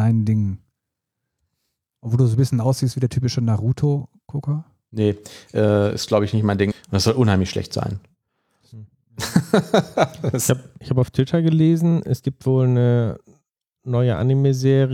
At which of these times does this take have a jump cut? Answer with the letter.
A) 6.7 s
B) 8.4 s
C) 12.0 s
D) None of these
A